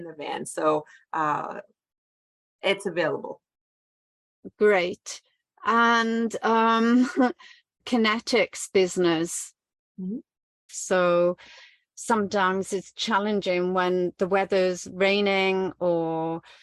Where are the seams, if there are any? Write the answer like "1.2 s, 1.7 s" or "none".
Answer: 7.8 s, 10.7 s